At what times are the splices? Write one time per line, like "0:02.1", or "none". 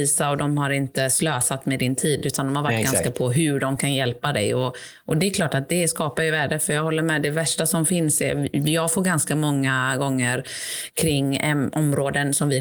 none